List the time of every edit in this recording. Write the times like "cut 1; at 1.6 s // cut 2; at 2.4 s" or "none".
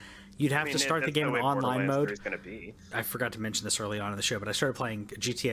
cut 1; at 2.9 s